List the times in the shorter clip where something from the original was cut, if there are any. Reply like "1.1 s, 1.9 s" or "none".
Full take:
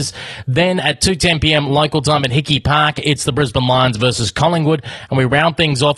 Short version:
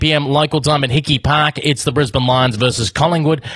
none